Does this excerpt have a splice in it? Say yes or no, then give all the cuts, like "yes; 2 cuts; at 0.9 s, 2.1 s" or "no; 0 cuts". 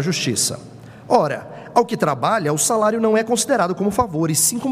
no; 0 cuts